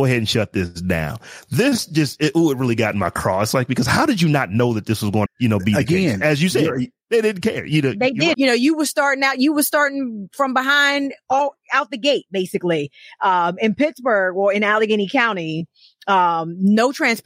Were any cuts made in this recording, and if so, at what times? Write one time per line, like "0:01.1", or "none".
0:05.3
0:08.3